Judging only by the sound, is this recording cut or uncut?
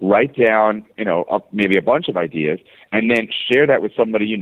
uncut